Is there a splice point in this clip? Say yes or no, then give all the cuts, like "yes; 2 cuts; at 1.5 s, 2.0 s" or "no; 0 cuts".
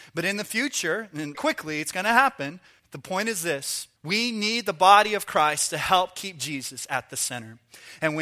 yes; 3 cuts; at 1.3 s, 2.8 s, 4.0 s